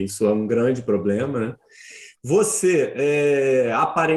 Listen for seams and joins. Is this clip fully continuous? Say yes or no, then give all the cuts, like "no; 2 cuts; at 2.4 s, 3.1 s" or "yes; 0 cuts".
no; 1 cut; at 2.2 s